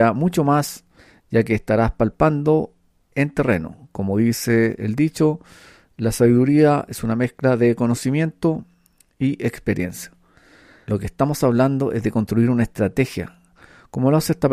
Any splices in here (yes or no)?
yes